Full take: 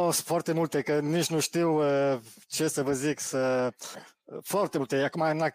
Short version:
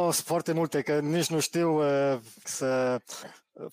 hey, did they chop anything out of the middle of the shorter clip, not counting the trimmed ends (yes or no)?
yes